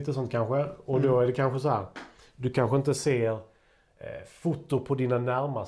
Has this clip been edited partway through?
no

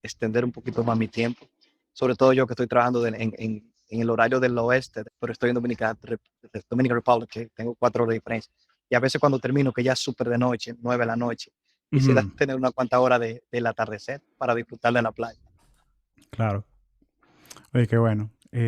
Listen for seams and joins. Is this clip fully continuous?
no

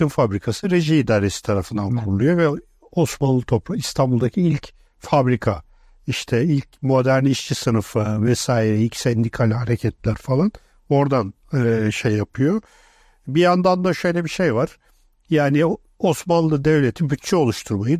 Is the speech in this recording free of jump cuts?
yes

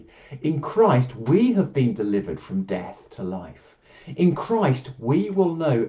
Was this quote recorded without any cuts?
yes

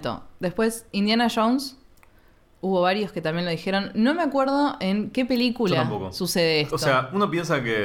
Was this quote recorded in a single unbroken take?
yes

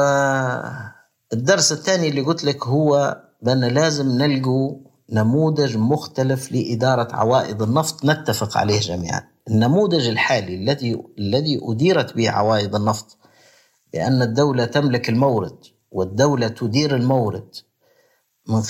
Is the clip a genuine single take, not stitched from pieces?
yes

